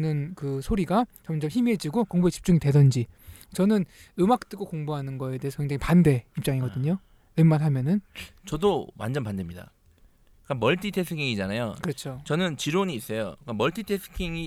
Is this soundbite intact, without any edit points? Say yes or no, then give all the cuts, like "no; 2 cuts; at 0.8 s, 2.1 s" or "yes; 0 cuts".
yes; 0 cuts